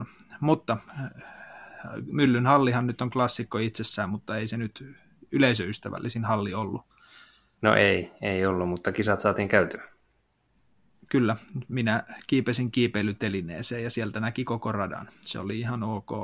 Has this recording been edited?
no; 0 cuts

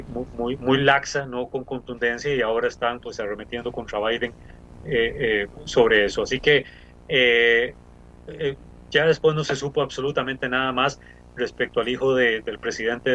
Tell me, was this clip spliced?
no; 0 cuts

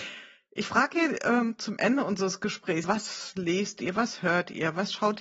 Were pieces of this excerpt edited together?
yes; 1 cut; at 2.8 s

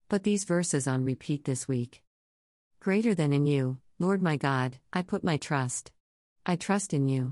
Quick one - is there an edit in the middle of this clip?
no; 0 cuts

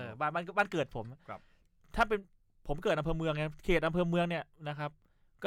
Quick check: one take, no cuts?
yes; 0 cuts

